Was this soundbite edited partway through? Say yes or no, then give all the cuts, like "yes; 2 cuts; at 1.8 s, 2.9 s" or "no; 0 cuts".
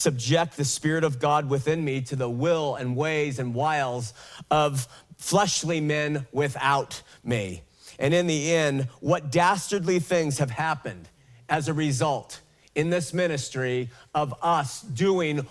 no; 0 cuts